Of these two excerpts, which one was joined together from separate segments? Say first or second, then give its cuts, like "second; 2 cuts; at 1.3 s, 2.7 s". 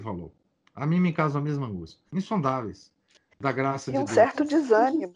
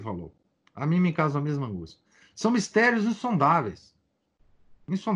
first; 1 cut; at 2.1 s